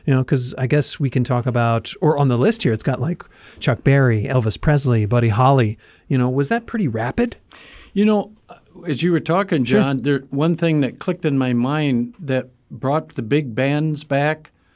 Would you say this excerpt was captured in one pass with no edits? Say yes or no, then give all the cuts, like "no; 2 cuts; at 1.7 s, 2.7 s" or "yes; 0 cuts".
yes; 0 cuts